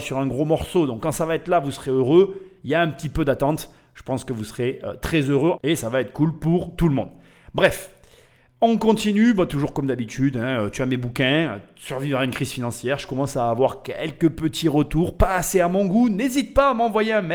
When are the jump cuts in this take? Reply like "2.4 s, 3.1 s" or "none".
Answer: 5.6 s

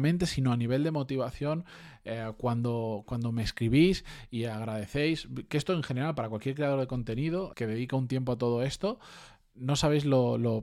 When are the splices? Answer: 7.5 s

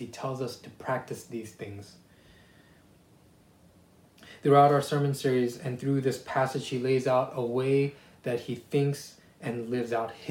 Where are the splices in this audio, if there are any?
none

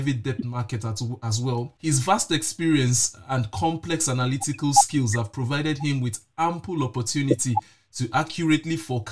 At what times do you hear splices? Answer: 1.8 s

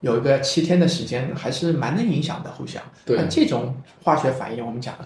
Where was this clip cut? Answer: none

